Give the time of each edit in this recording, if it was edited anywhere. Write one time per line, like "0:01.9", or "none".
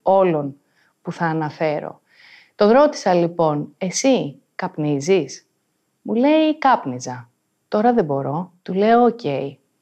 none